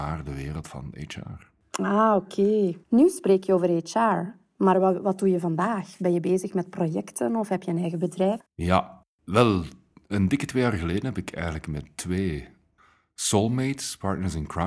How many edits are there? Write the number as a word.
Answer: two